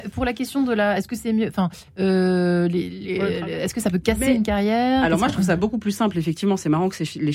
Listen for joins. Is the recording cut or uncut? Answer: uncut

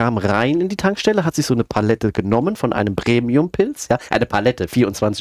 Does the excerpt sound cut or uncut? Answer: uncut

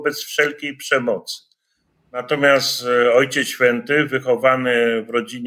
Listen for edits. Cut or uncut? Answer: uncut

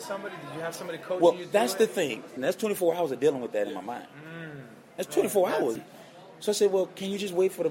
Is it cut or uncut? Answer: cut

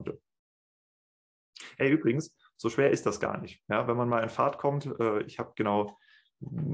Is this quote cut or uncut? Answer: uncut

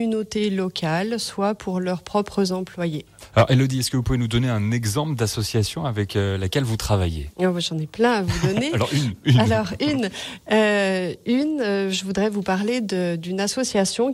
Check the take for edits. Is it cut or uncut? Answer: uncut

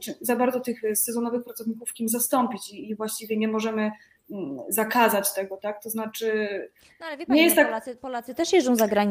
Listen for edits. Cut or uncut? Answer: uncut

